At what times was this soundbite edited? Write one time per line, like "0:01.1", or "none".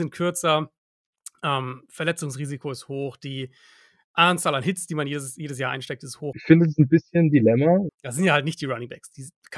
0:06.3
0:07.9